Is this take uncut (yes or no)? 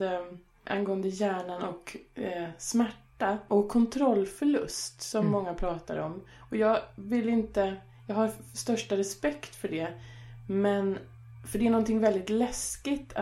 yes